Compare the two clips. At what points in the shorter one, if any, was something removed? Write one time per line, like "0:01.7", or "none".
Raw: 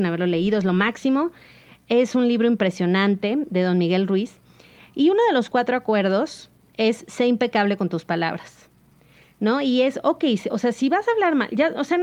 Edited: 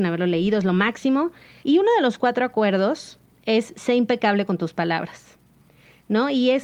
0:01.6